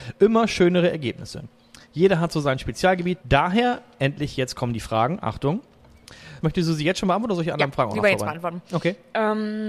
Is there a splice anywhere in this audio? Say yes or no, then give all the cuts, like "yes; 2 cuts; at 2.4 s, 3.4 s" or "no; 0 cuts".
yes; 2 cuts; at 3.2 s, 6.4 s